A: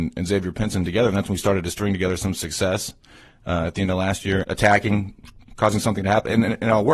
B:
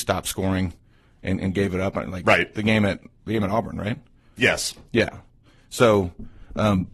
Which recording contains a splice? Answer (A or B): A